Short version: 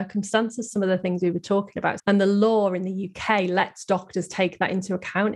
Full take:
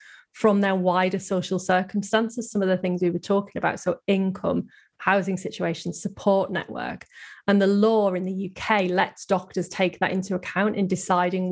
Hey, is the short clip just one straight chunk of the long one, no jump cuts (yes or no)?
no